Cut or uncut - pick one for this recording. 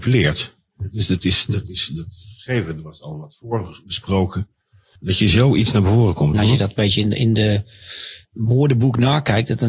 cut